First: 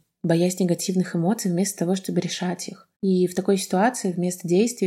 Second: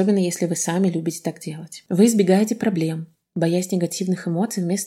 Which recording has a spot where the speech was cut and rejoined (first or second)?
first